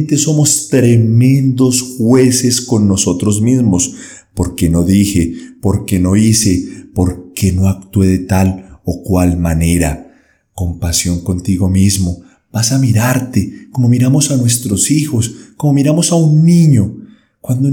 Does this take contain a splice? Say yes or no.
no